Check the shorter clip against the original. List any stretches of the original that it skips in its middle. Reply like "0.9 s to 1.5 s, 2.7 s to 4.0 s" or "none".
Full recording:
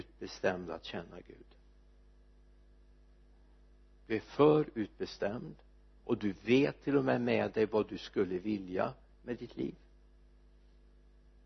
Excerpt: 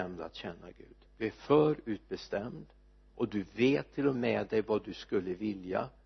1.5 s to 3.9 s, 7.0 s to 7.2 s